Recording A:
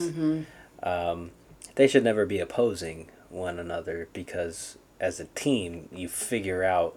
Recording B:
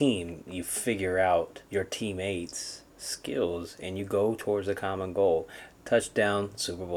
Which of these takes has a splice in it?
B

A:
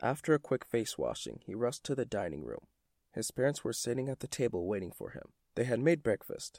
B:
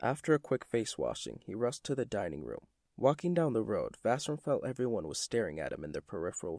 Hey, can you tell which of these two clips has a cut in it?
B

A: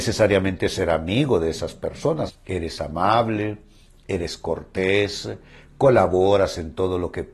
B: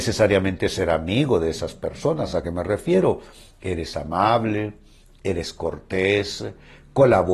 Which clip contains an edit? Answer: A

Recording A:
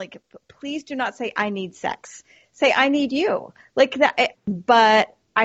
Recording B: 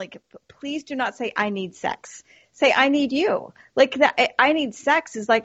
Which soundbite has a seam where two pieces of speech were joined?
A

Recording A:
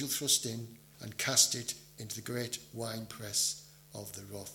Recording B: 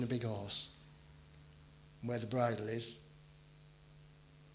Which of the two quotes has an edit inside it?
A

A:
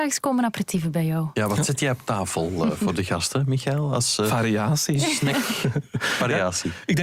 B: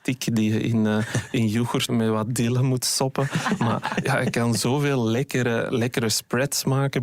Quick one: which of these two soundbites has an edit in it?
B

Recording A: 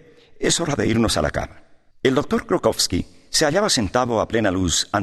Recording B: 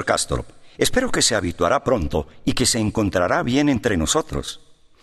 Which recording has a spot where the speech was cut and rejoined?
A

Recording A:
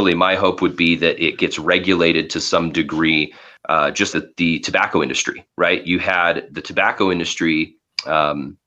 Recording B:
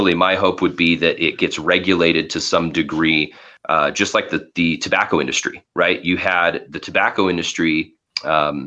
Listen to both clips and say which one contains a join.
A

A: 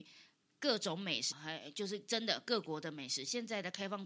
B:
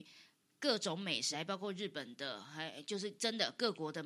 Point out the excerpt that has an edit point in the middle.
A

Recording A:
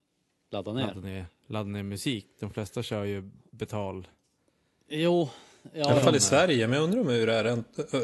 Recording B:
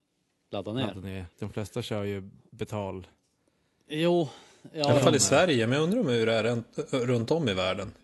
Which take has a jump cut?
B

